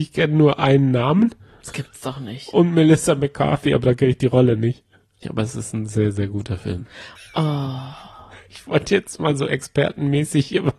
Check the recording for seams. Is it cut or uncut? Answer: cut